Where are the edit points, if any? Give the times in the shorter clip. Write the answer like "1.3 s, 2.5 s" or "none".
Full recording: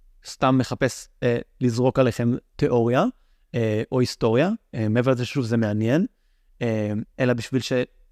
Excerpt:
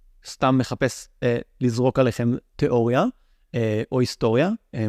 none